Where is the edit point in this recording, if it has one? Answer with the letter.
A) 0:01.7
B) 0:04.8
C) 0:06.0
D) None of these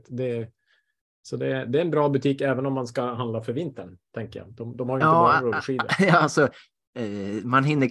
D